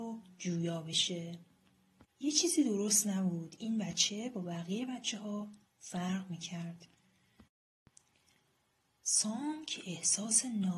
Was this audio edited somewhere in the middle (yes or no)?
yes